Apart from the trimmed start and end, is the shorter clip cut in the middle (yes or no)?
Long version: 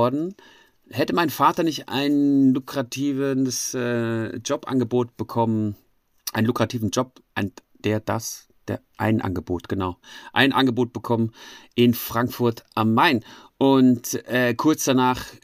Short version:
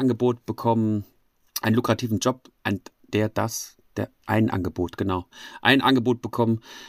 no